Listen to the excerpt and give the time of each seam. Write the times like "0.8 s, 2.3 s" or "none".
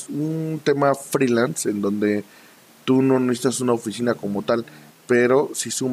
4.9 s